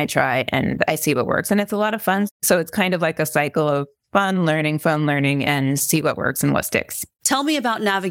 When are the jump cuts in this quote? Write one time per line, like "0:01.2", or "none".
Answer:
0:07.2